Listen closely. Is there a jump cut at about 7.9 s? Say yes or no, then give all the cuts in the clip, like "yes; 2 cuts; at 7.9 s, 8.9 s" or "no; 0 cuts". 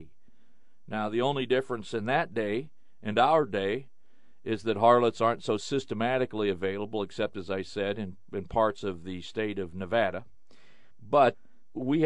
no; 0 cuts